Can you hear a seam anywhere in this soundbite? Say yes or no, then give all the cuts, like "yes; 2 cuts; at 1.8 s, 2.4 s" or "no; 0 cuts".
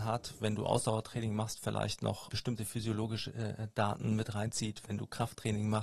yes; 1 cut; at 2.3 s